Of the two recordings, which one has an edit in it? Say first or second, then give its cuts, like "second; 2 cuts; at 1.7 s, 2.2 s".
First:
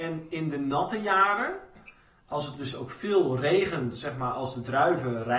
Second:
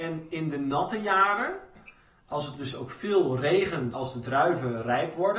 second; 1 cut; at 3.9 s